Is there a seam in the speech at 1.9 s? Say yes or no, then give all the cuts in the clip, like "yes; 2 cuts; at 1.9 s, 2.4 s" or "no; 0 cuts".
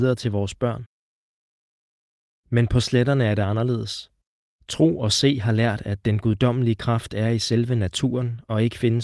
no; 0 cuts